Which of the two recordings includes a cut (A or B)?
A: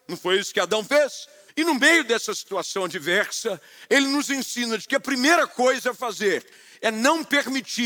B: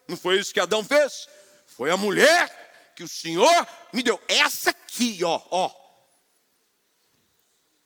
A